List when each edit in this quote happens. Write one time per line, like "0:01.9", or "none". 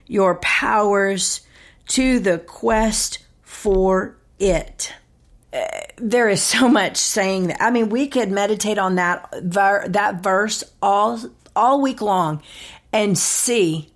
0:05.4